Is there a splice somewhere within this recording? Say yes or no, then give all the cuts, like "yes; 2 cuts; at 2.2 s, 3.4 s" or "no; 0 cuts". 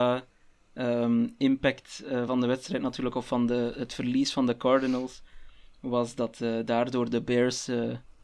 no; 0 cuts